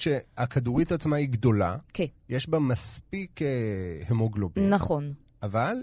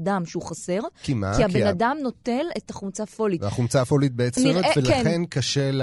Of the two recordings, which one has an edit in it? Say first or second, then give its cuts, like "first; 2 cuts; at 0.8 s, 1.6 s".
second; 1 cut; at 4.4 s